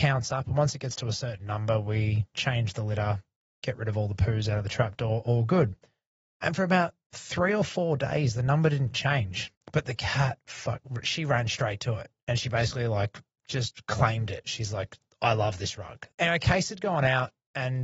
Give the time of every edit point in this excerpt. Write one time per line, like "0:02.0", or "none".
0:09.6
0:16.1